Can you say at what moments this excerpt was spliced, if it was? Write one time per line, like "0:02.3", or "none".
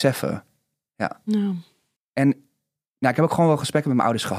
0:02.0